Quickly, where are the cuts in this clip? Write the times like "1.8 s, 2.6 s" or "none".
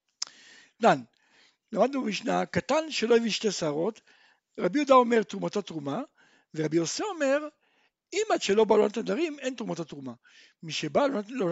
none